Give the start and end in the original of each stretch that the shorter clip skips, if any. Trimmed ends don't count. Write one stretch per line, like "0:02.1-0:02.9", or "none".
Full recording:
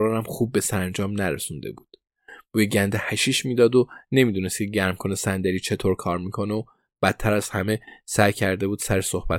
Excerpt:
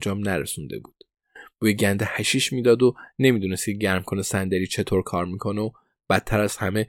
none